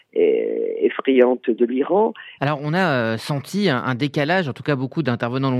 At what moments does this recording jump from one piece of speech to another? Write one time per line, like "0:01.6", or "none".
0:02.4